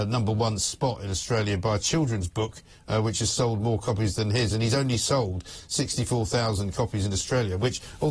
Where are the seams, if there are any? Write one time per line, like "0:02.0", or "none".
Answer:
none